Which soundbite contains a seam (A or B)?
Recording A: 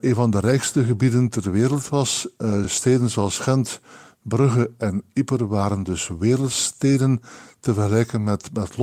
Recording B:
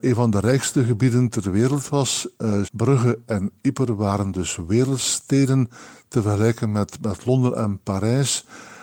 B